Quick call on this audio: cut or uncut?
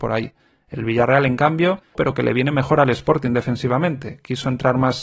cut